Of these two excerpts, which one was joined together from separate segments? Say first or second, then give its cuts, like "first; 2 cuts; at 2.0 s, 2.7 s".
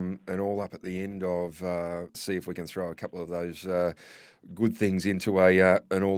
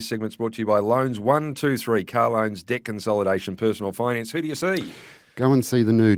first; 1 cut; at 2.1 s